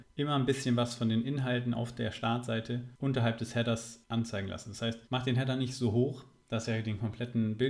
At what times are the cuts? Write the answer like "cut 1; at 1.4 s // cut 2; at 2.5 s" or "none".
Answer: cut 1; at 5.0 s